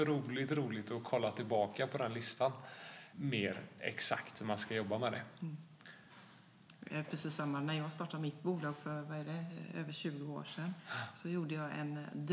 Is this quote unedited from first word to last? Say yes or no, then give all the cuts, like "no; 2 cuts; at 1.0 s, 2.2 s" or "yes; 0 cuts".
no; 1 cut; at 3.1 s